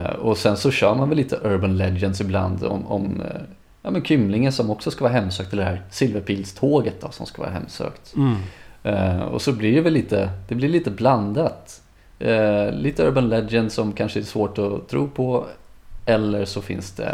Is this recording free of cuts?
yes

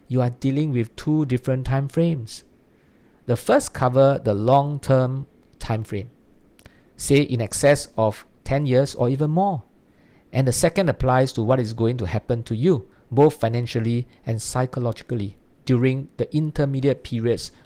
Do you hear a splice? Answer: no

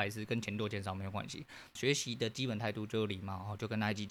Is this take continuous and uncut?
no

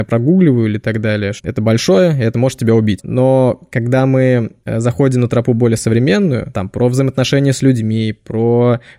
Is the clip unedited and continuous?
no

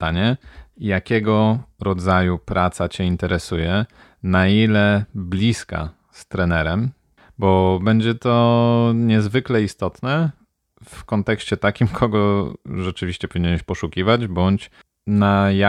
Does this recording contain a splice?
no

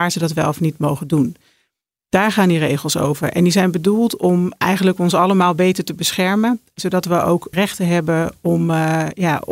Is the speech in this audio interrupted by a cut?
no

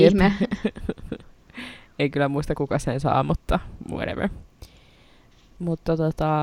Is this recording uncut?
yes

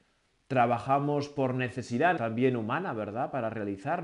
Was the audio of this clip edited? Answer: yes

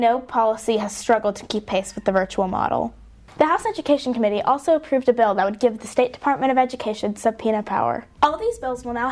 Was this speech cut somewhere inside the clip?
yes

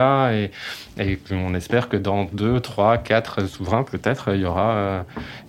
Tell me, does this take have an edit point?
no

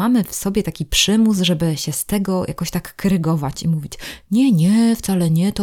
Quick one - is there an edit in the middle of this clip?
no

